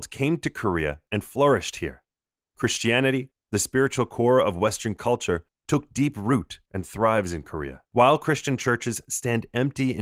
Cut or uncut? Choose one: cut